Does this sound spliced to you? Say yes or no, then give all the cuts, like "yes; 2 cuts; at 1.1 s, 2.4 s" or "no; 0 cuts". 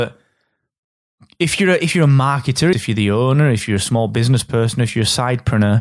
yes; 1 cut; at 2.7 s